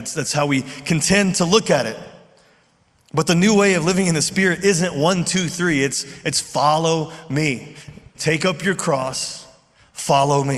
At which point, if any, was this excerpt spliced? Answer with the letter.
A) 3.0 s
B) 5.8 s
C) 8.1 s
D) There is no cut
C